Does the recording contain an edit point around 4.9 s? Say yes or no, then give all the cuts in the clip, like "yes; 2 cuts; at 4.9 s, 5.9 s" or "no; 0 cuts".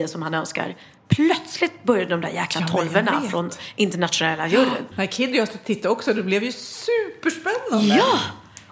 no; 0 cuts